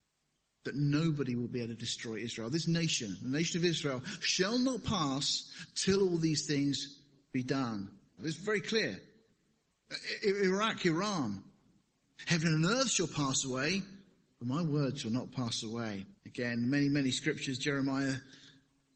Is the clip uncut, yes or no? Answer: no